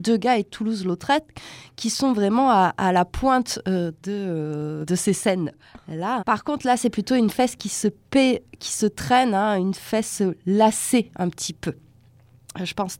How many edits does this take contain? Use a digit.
1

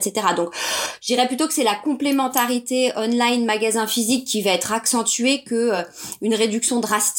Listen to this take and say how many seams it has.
0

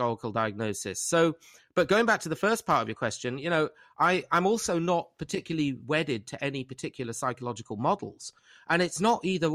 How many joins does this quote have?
0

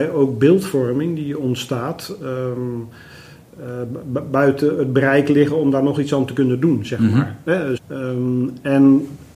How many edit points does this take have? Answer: 1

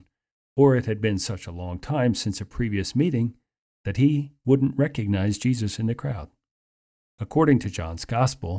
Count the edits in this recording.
1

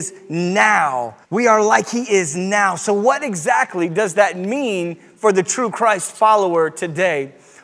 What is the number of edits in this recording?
1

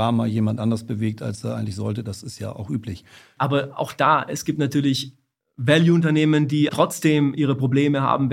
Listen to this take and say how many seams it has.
2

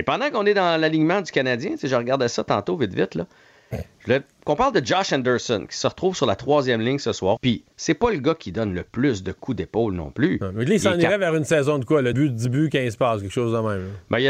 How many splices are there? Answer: 2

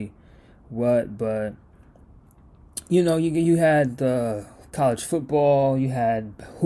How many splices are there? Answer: 0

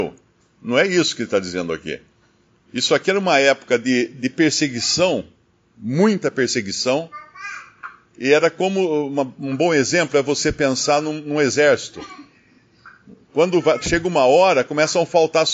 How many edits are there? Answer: 1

